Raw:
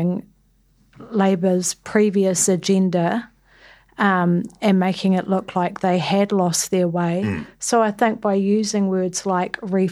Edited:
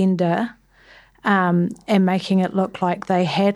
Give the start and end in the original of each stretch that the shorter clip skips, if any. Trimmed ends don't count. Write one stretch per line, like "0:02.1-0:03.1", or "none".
none